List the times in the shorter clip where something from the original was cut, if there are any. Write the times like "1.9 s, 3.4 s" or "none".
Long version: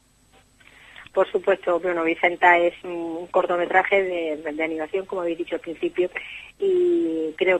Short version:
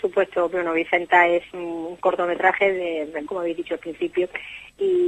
3.3 s